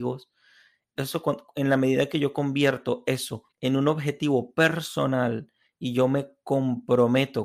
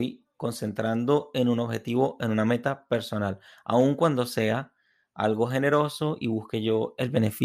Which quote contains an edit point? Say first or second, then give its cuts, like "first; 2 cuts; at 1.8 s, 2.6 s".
first; 2 cuts; at 1.0 s, 3.5 s